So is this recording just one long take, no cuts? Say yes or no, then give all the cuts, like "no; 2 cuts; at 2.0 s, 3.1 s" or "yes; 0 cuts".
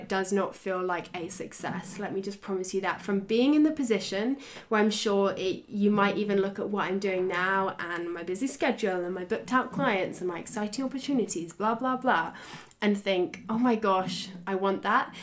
yes; 0 cuts